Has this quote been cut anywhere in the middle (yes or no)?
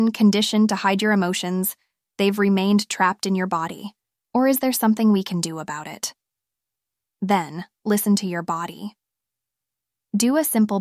yes